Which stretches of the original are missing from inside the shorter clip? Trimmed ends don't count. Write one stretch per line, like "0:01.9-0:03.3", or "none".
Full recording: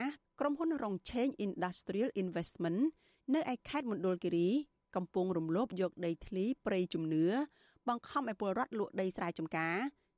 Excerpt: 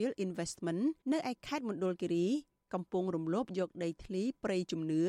0:03.0-0:03.2